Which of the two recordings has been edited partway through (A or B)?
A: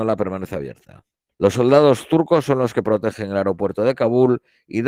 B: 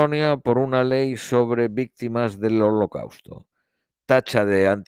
A